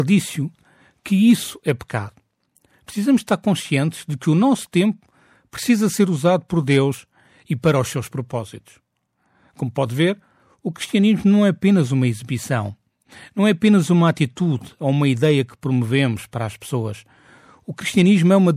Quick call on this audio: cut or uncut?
uncut